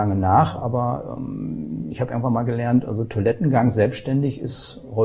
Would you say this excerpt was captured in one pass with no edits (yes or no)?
yes